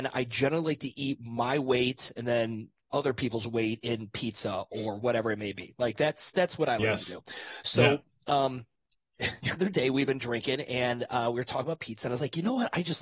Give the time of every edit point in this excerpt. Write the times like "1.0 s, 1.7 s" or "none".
none